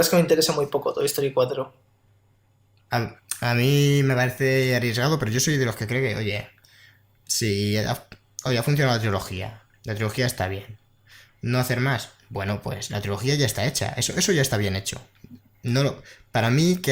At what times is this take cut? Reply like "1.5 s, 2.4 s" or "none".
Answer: none